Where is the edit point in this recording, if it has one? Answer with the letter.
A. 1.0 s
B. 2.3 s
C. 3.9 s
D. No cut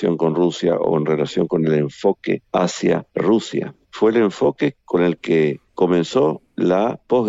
D